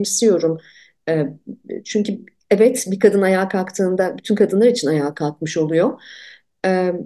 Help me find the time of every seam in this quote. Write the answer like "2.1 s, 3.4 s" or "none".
none